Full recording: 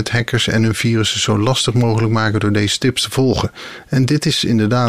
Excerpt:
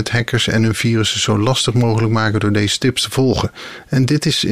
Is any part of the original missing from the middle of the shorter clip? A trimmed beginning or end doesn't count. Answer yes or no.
no